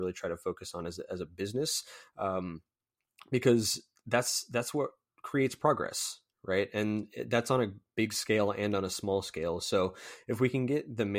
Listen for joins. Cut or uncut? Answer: uncut